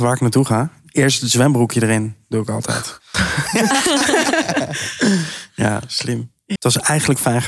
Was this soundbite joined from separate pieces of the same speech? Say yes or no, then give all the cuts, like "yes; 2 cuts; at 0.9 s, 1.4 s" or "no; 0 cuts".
yes; 2 cuts; at 3.1 s, 6.6 s